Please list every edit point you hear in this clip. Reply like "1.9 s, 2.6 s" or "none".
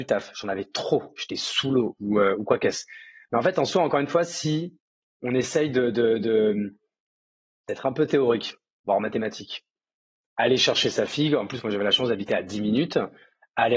none